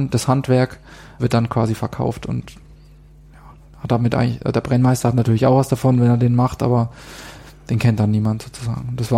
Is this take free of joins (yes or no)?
no